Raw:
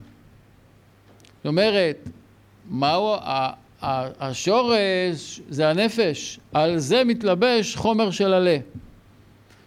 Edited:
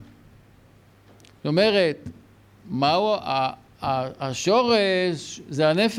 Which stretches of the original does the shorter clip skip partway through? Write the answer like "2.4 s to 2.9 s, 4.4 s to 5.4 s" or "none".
none